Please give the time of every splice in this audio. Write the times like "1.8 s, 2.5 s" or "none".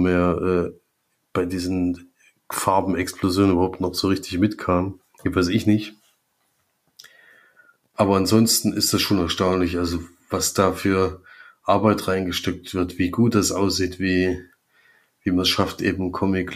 none